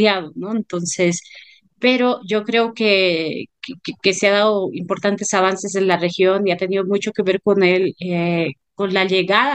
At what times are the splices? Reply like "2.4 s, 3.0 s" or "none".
none

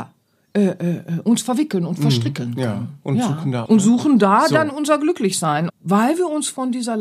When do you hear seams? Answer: 3.7 s, 5.7 s

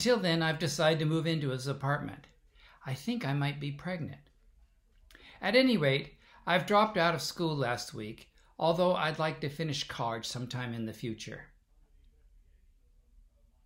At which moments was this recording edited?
none

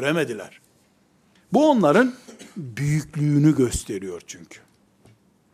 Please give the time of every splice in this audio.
none

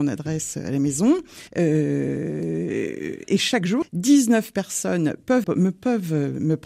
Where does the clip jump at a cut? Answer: 1.5 s, 3.8 s, 5.4 s

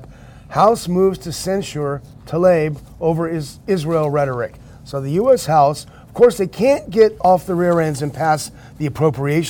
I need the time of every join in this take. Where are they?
none

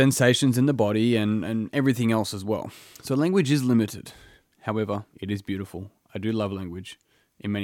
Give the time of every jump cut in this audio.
5.1 s

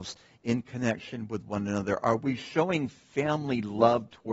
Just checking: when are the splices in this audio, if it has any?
none

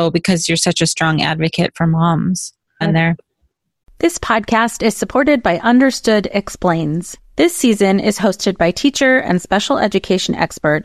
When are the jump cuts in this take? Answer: 2.8 s, 7.2 s

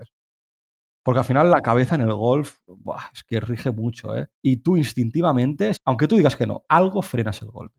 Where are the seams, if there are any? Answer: 4.3 s, 5.8 s

